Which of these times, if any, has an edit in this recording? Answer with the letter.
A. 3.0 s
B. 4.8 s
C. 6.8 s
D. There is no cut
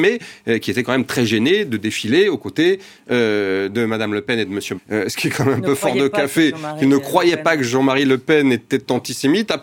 B